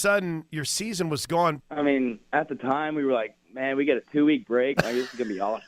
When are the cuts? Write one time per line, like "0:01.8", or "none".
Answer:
0:01.6